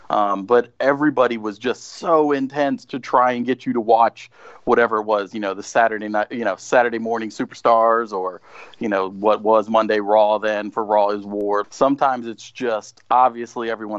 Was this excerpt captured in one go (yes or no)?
no